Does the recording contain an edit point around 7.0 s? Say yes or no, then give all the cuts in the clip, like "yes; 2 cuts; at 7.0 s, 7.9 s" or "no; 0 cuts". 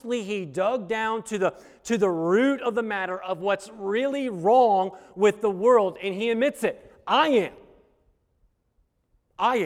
no; 0 cuts